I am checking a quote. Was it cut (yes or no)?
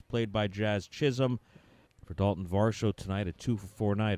yes